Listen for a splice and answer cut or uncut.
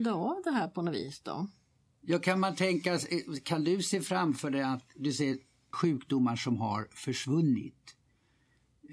cut